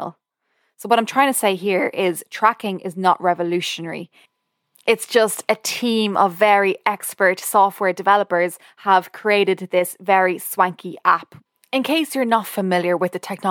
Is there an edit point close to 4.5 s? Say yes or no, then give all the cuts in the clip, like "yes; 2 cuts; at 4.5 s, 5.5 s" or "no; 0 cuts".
no; 0 cuts